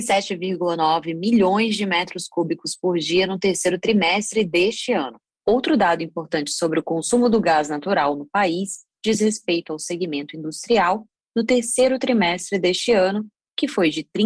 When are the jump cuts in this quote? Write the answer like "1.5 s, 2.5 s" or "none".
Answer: 5.4 s